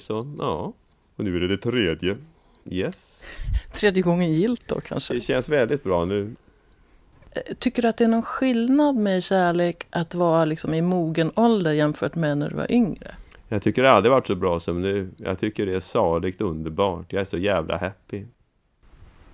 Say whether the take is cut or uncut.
uncut